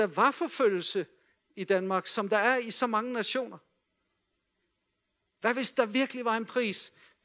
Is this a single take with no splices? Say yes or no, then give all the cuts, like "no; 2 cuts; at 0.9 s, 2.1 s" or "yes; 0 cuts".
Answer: yes; 0 cuts